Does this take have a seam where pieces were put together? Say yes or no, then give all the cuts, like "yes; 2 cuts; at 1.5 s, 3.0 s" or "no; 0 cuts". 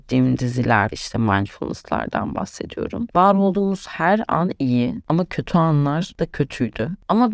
yes; 2 cuts; at 0.9 s, 3.1 s